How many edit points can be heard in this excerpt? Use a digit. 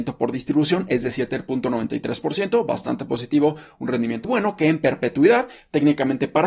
1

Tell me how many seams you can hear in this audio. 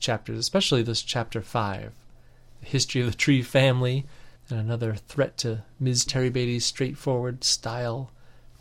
2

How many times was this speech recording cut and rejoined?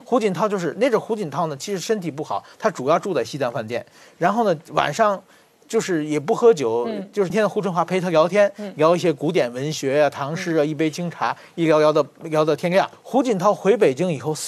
2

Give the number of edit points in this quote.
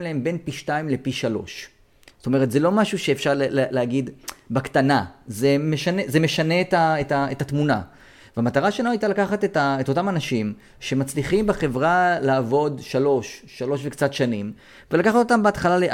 0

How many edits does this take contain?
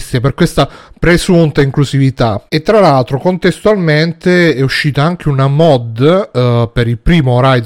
1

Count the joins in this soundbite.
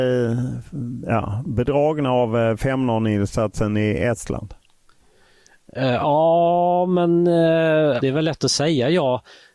1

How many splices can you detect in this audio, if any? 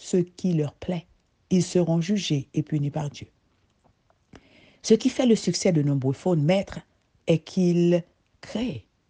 1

